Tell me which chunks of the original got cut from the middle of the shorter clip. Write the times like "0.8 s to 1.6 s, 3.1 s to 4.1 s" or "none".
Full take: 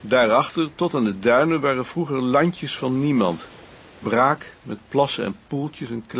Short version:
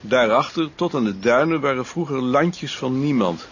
none